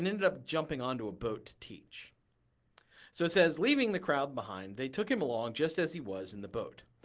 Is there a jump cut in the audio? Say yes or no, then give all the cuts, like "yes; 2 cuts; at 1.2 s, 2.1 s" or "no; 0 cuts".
no; 0 cuts